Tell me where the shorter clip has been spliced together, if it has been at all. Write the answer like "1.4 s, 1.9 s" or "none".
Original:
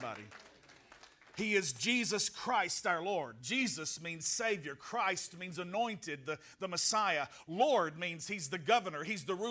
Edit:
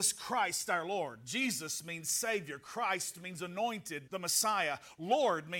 4.1 s